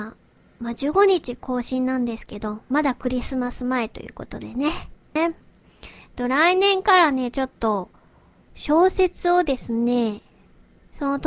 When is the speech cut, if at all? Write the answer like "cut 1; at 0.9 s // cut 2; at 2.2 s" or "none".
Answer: cut 1; at 5.2 s